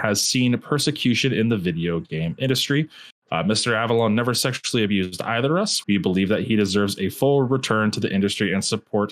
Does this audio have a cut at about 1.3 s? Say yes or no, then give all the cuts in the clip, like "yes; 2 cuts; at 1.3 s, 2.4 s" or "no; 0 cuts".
no; 2 cuts; at 3.2 s, 5.8 s